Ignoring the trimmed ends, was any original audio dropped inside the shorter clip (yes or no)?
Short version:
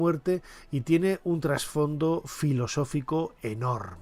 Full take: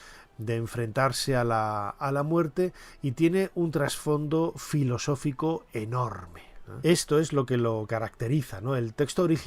no